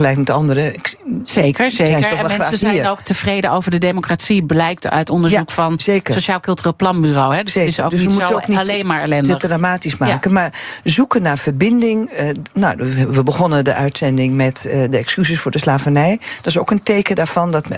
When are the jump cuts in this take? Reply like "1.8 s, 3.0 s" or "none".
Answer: none